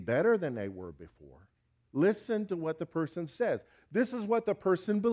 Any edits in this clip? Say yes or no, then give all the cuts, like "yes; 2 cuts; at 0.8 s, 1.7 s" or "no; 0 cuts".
yes; 1 cut; at 1.9 s